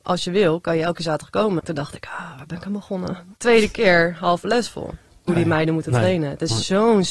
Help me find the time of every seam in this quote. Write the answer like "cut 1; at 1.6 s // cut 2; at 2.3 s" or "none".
cut 1; at 1.6 s // cut 2; at 3.4 s // cut 3; at 5.3 s